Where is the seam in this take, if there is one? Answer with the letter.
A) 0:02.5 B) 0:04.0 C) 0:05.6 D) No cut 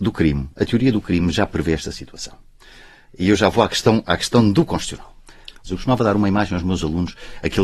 C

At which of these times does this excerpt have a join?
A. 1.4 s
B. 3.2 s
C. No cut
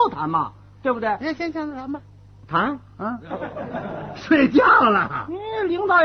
B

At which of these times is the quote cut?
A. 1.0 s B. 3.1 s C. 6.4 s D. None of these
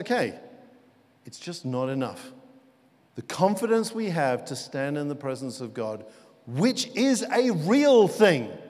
B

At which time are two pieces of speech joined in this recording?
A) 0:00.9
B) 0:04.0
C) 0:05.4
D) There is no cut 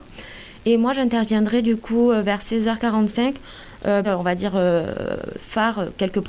B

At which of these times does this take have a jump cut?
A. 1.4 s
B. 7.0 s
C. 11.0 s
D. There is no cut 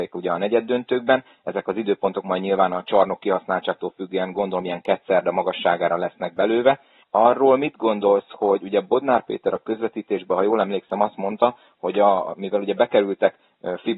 B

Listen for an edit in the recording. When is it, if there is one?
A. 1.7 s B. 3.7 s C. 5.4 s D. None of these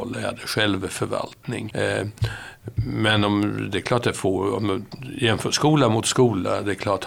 A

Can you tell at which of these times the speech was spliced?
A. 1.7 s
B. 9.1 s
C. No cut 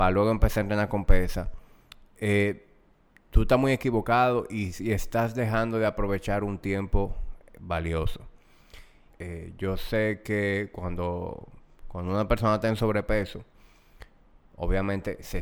B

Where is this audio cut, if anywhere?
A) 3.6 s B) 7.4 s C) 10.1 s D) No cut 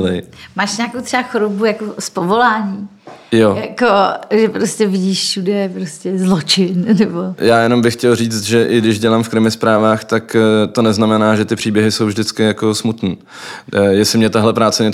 B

